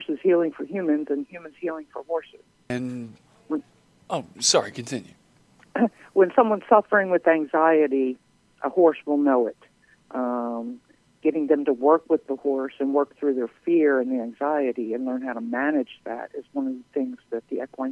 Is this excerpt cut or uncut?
uncut